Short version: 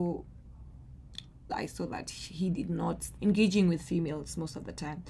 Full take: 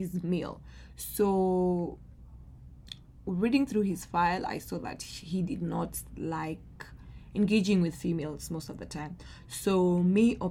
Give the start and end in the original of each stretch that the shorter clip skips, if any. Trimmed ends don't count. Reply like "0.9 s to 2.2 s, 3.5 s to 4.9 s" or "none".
3.2 s to 4.4 s, 6.1 s to 7.3 s

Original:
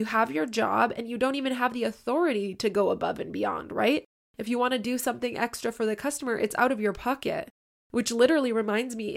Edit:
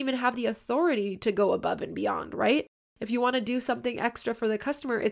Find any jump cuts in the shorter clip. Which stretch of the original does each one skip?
none

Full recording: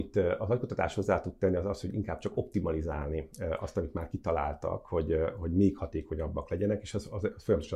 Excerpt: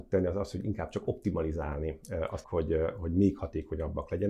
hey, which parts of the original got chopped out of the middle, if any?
3.7 s to 4.8 s

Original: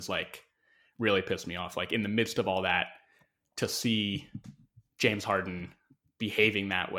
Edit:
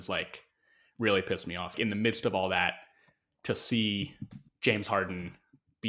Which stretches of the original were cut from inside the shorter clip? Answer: 1.7 s to 1.9 s, 4.6 s to 4.9 s

